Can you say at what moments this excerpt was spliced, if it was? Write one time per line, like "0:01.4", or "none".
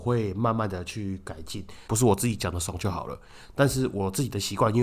0:01.9